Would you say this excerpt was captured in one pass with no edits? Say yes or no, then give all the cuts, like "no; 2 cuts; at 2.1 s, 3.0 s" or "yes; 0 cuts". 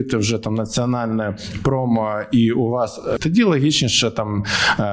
no; 1 cut; at 3.2 s